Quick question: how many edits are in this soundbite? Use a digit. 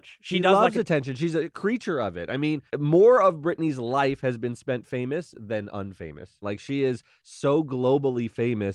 2